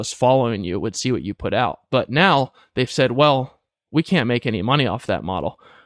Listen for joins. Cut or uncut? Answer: uncut